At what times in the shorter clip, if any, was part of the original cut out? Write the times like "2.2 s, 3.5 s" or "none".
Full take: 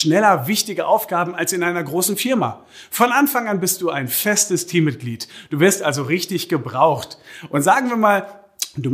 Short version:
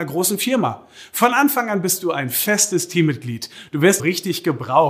4.0 s